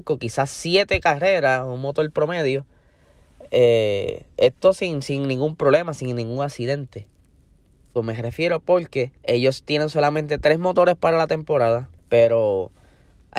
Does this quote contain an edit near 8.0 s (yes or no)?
yes